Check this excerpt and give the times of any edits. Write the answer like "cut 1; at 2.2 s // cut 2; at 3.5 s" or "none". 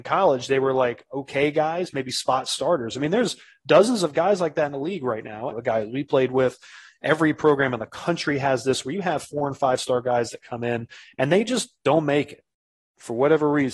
cut 1; at 5.5 s